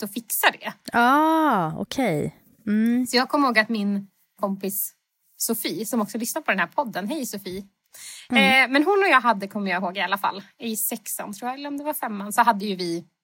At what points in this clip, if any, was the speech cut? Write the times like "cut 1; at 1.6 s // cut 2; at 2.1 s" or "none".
none